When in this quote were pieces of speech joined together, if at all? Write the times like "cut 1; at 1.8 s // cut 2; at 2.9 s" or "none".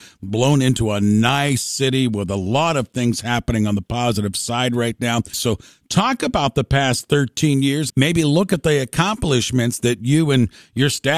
cut 1; at 5.3 s // cut 2; at 7.9 s